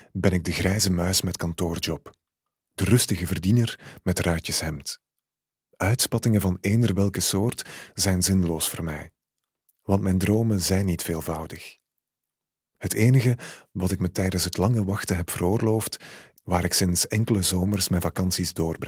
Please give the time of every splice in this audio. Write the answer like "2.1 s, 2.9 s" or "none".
16.3 s